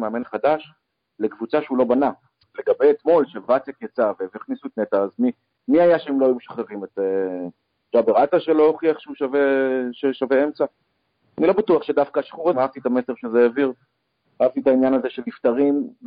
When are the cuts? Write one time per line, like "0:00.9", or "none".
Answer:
0:02.4
0:12.5

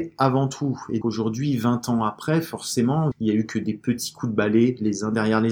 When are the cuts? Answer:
0:01.0
0:03.1

